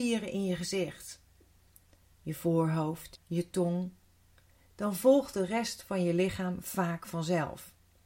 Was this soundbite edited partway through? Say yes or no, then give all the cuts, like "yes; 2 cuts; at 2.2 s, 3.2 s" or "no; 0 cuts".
yes; 1 cut; at 3.2 s